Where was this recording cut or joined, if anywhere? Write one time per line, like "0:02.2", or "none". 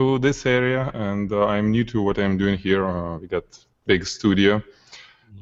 none

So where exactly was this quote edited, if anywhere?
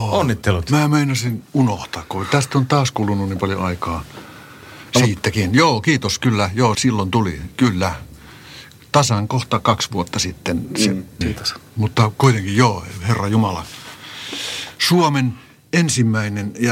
0:06.7
0:11.2

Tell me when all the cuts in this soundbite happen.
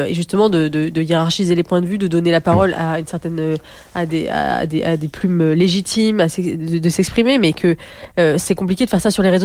none

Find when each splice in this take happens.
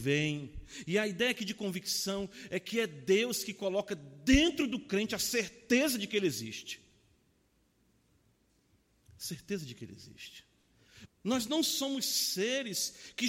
0:11.1

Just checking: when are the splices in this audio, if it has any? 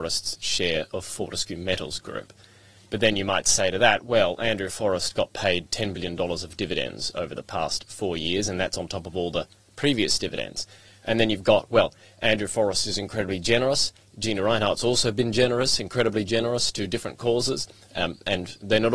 none

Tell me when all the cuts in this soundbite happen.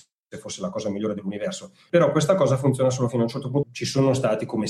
0:01.9
0:03.6

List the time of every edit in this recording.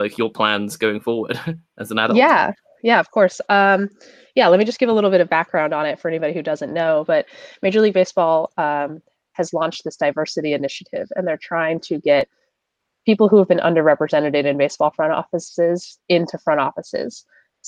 none

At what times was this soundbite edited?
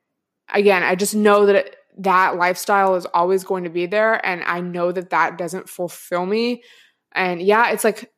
none

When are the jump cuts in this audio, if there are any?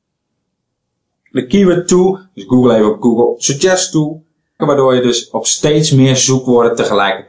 0:01.1
0:04.6

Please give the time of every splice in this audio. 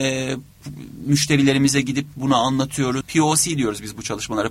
0:03.0

